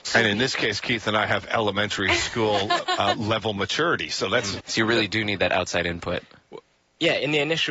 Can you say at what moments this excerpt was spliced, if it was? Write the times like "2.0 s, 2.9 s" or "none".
4.6 s